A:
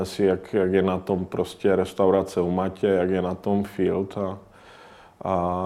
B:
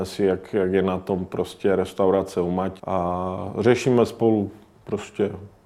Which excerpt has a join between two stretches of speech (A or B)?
B